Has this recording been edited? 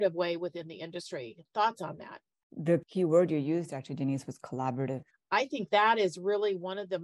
yes; 1 cut; at 5.1 s

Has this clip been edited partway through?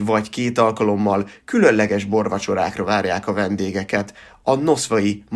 no; 0 cuts

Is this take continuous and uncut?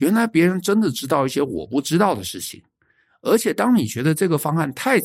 yes; 0 cuts

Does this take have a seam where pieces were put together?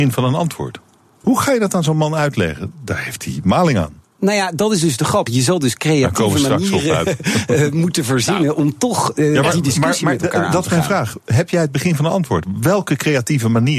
yes; 2 cuts; at 1.2 s, 5.3 s

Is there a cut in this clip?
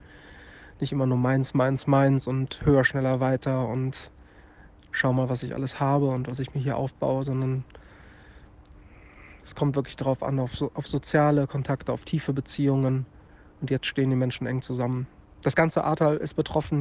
no; 0 cuts

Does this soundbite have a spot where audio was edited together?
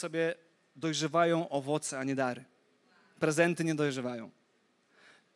no; 0 cuts

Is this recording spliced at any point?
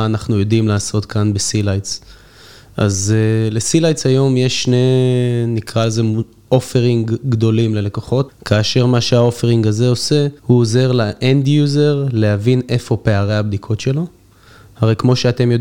yes; 2 cuts; at 8.3 s, 10.4 s

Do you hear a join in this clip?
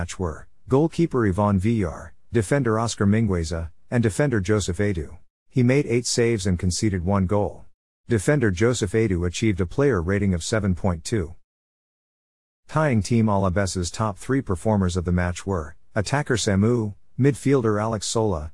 yes; 2 cuts; at 5.3 s, 8.0 s

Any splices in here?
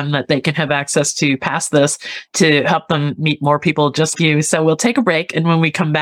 yes; 1 cut; at 4.1 s

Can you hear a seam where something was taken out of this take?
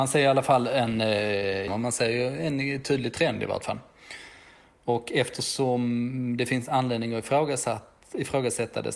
yes; 1 cut; at 1.7 s

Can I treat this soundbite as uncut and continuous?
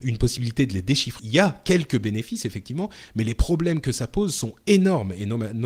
no; 1 cut; at 1.2 s

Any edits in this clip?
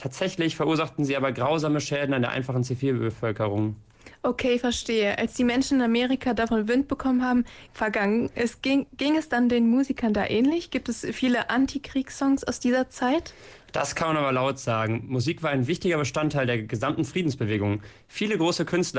yes; 1 cut; at 7.7 s

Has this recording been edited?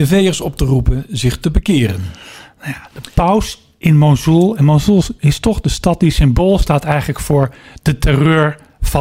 no; 0 cuts

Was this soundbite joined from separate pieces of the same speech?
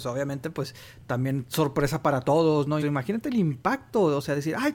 yes; 1 cut; at 2.8 s

